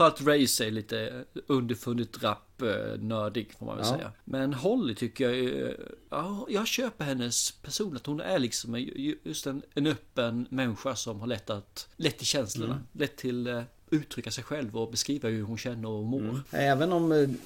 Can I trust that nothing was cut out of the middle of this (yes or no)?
no